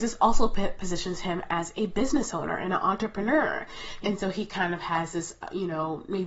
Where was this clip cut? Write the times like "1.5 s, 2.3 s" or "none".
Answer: 4.0 s